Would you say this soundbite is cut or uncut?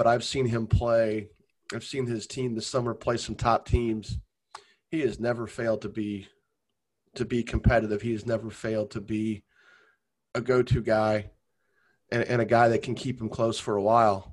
uncut